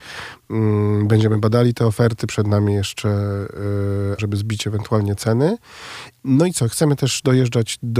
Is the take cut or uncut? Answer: cut